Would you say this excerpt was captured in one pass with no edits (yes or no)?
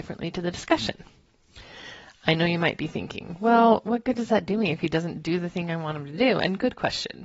yes